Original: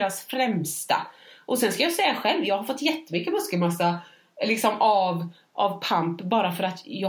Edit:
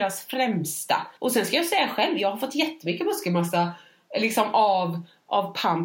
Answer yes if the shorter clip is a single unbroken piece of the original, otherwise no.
no